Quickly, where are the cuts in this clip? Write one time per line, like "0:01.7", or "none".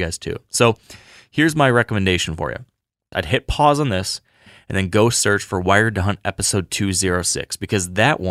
0:03.1